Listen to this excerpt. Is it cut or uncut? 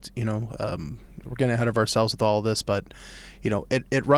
uncut